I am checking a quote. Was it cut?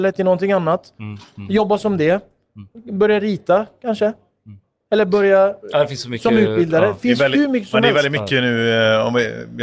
no; 0 cuts

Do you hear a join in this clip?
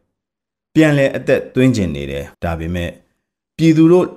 yes; 1 cut; at 2.3 s

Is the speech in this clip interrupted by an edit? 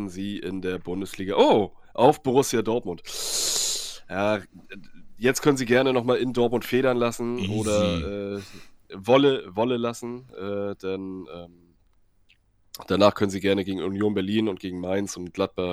no; 0 cuts

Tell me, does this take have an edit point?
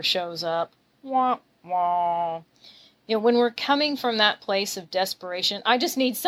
no; 0 cuts

